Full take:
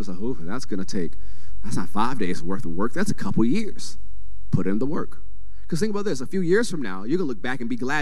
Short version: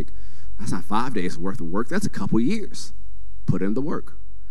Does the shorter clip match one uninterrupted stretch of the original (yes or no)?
yes